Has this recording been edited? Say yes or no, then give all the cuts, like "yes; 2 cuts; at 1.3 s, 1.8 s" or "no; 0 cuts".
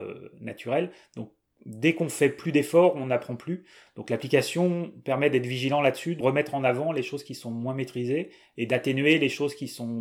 yes; 2 cuts; at 3.9 s, 6.2 s